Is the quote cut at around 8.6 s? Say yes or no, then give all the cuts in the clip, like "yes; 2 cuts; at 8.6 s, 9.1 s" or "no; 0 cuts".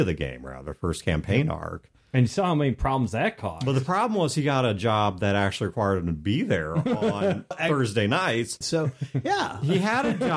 yes; 2 cuts; at 7.5 s, 8.6 s